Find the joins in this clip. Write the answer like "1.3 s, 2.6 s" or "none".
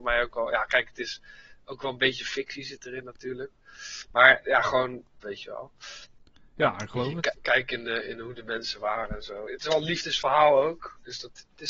5.2 s, 7.3 s